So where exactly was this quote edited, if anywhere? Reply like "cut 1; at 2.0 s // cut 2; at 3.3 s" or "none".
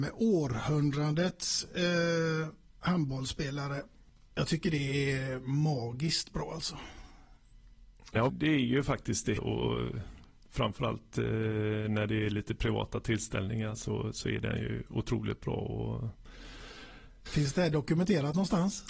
cut 1; at 8.3 s // cut 2; at 9.4 s // cut 3; at 17.3 s